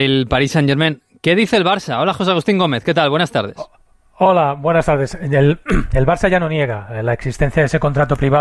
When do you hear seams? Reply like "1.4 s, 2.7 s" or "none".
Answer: none